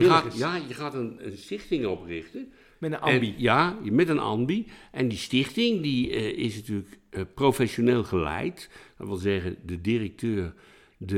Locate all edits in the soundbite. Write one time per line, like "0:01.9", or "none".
none